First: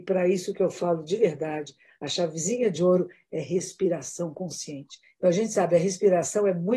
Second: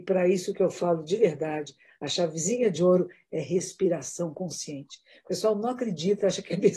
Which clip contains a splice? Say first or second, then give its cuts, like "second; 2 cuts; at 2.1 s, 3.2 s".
first; 1 cut; at 5.0 s